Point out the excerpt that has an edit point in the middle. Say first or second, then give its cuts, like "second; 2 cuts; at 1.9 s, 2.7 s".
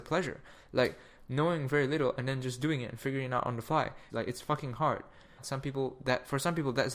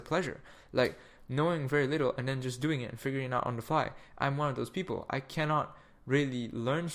first; 2 cuts; at 4.1 s, 5.4 s